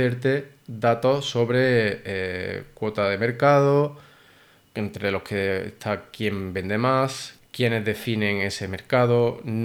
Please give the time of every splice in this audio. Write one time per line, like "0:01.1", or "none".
0:04.7
0:07.4